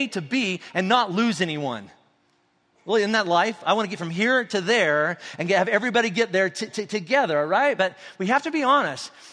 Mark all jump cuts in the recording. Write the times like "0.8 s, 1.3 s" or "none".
none